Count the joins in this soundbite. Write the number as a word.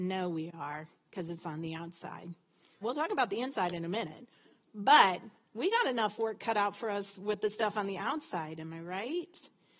one